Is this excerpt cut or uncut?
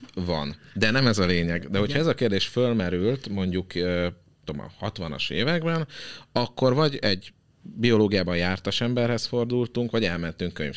uncut